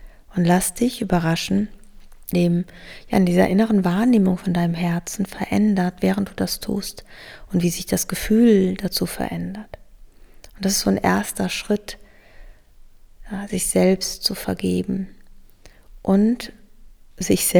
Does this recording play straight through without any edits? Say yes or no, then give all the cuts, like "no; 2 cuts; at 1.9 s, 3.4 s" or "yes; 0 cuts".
no; 1 cut; at 2.3 s